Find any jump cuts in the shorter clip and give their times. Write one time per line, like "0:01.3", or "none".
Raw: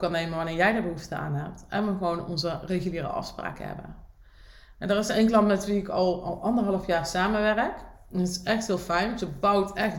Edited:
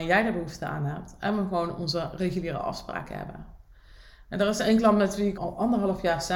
0:05.4